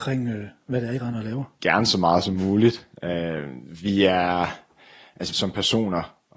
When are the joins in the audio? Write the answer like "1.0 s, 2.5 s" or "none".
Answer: 1.6 s, 5.3 s